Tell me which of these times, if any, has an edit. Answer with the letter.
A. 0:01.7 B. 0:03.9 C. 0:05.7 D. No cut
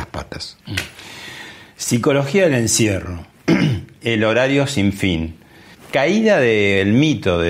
C